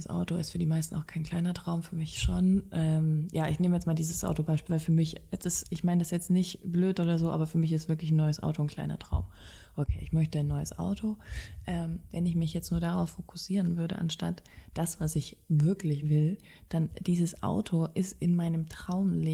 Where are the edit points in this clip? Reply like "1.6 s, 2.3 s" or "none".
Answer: 16.0 s